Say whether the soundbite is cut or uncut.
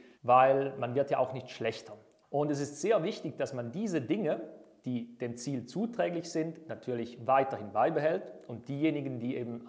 cut